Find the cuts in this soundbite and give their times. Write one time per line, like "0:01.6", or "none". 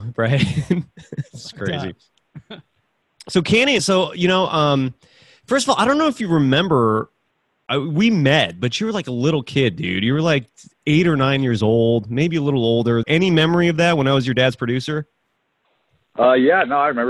0:03.8
0:13.0